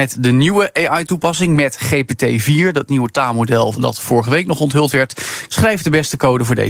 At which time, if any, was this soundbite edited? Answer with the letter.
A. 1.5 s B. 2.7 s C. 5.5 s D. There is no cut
C